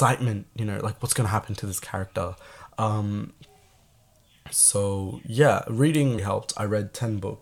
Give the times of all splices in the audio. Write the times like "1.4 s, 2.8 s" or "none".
2.7 s, 6.2 s